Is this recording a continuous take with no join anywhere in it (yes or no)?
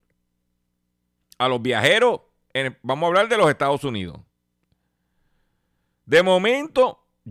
yes